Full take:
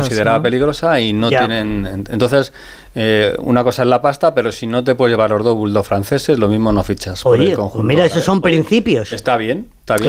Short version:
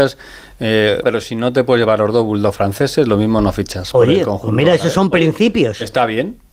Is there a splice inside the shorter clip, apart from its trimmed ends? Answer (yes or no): yes